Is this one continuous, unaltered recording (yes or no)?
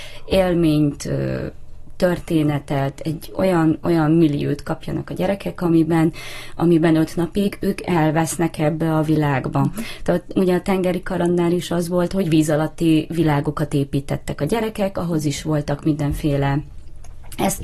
yes